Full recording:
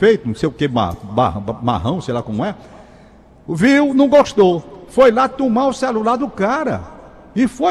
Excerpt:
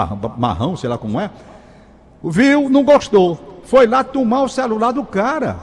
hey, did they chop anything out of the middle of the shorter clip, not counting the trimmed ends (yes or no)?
no